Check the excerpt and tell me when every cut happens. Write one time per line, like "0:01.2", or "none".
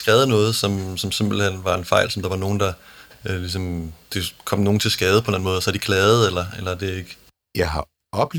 0:04.0